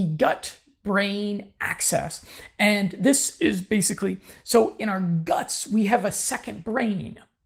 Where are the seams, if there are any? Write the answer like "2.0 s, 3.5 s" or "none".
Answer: none

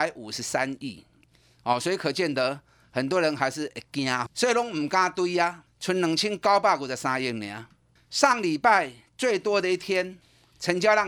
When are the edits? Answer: 4.3 s, 5.7 s

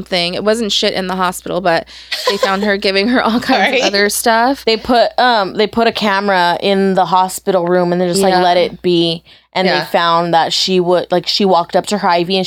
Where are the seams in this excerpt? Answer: none

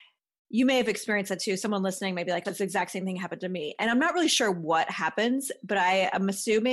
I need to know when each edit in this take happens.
2.4 s

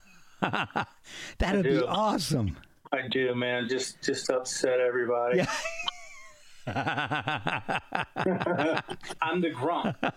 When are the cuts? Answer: 9.2 s

